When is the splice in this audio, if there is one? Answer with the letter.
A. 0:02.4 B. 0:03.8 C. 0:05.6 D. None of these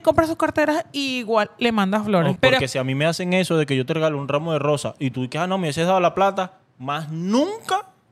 A